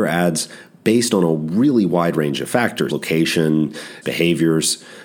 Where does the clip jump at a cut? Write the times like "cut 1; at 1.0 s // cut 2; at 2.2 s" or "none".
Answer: cut 1; at 2.9 s // cut 2; at 4.0 s